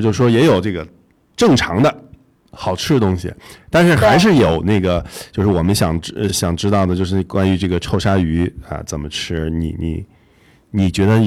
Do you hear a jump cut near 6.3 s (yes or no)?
no